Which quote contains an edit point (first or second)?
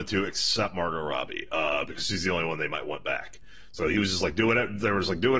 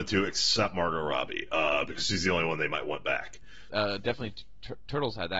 second